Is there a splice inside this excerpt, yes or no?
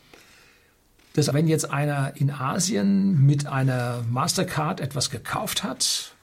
yes